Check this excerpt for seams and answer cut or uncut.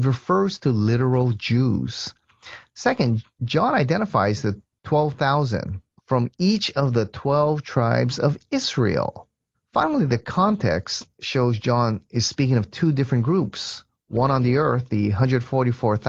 cut